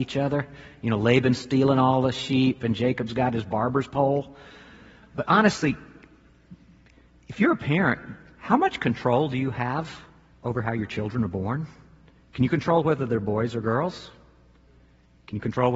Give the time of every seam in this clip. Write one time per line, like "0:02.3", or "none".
none